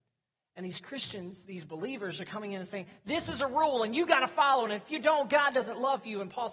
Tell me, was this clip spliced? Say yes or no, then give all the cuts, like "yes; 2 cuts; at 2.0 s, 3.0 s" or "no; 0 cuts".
no; 0 cuts